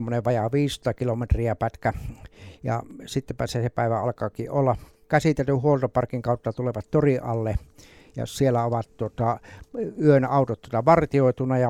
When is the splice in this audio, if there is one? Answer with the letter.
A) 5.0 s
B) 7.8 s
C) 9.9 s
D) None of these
D